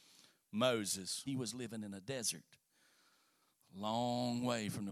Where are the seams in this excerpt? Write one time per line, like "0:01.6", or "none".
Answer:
0:01.3